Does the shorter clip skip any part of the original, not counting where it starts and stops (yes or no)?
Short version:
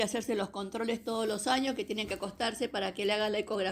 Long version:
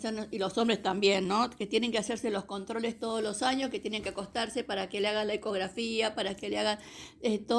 no